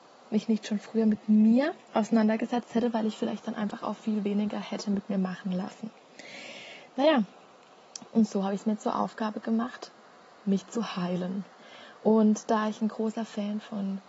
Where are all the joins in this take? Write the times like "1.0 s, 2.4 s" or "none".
none